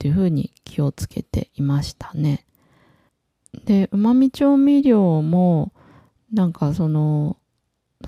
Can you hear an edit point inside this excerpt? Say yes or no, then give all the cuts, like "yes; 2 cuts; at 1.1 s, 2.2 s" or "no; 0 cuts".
no; 0 cuts